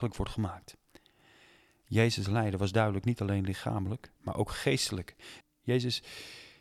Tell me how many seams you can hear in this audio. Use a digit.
2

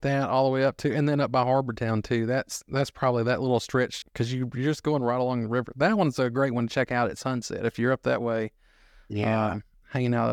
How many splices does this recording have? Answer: 1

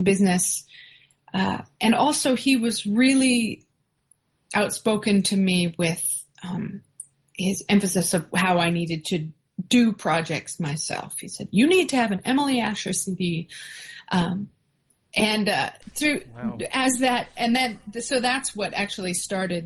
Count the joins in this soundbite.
0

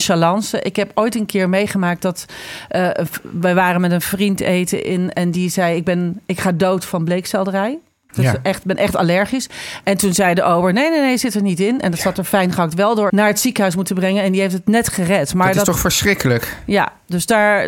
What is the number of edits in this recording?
1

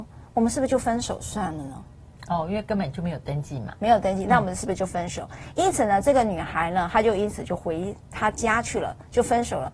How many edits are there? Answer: 0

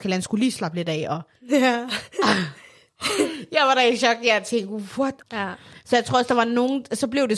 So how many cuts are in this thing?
1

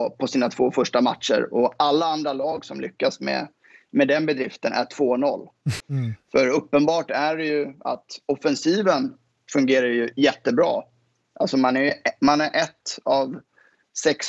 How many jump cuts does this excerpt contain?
1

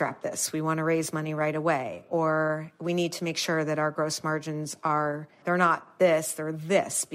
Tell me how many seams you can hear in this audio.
1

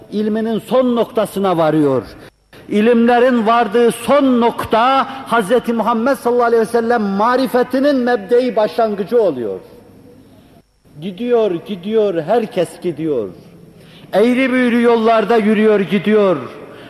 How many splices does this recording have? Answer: 0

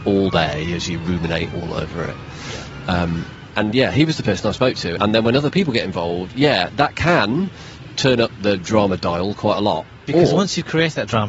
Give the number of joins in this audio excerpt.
1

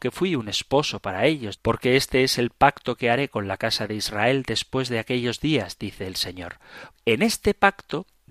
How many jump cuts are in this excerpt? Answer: 2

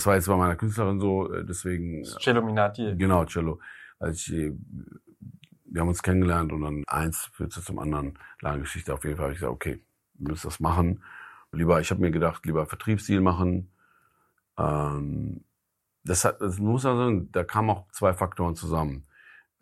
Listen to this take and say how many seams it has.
2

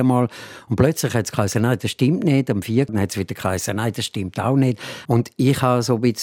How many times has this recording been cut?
2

